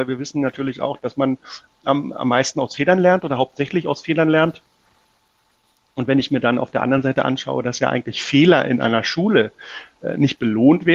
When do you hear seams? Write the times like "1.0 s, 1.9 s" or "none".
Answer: none